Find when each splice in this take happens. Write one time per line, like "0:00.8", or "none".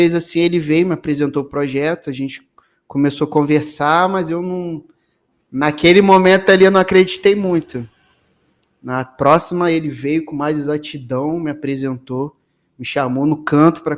none